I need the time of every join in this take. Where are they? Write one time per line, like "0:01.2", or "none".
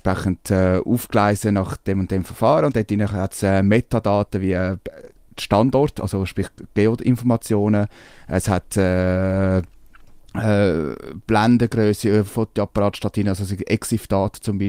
none